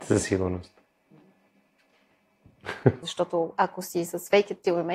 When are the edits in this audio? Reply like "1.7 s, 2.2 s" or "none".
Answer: 3.0 s